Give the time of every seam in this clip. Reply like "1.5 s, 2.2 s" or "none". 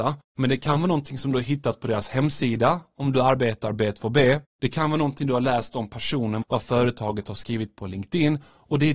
6.4 s